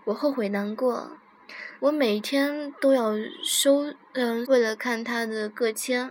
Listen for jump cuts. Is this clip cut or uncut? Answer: cut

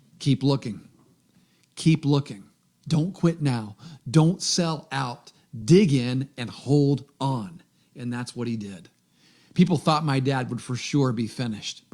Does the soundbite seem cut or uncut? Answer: uncut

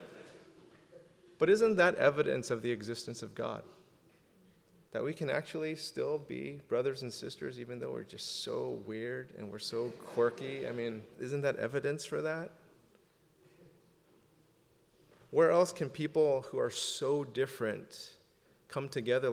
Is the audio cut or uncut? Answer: uncut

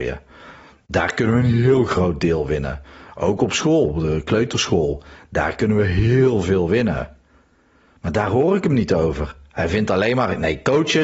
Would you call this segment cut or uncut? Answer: cut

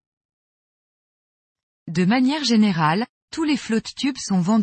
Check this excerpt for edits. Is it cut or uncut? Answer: cut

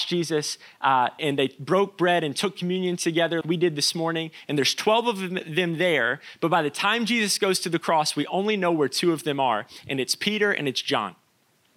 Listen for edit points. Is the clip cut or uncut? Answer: cut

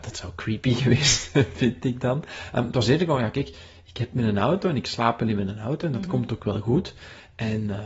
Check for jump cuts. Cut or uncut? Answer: uncut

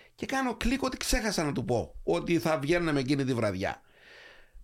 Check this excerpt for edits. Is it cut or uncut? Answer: uncut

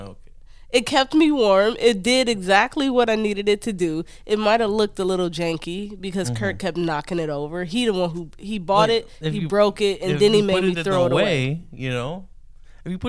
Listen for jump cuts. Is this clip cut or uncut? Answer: uncut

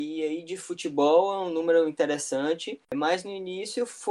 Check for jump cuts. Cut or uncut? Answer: cut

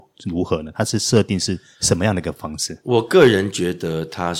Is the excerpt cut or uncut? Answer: uncut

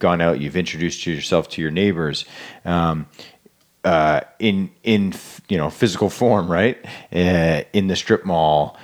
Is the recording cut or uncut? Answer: uncut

